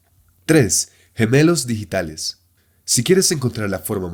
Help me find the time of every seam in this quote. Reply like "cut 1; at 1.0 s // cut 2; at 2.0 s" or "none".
none

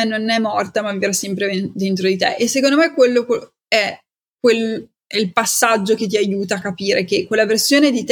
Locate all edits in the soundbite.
none

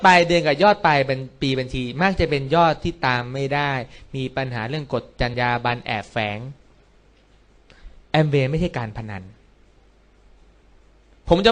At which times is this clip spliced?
cut 1; at 5.3 s

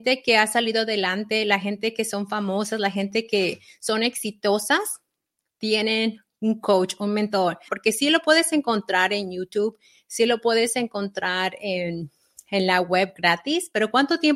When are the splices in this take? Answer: cut 1; at 7.7 s

